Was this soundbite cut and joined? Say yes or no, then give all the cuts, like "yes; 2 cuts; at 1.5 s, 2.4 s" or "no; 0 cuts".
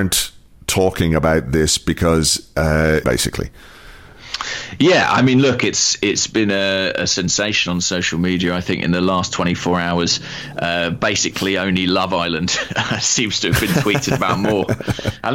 yes; 1 cut; at 3.0 s